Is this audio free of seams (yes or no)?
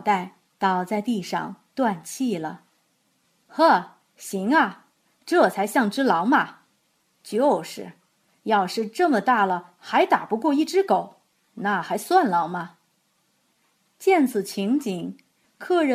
yes